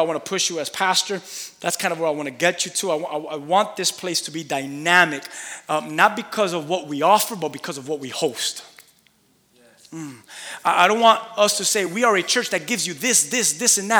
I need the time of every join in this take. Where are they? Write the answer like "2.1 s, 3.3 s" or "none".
none

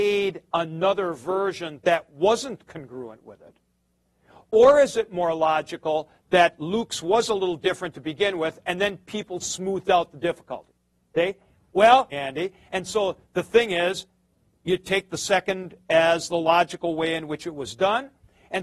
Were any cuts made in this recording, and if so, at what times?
12.1 s

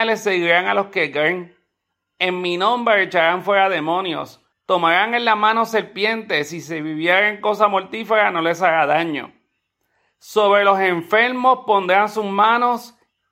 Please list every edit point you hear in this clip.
4.5 s

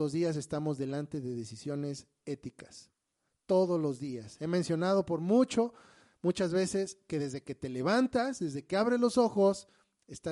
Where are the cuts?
none

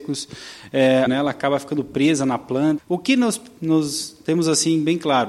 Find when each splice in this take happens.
1.1 s, 2.8 s

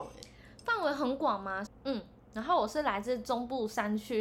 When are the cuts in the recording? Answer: 1.7 s

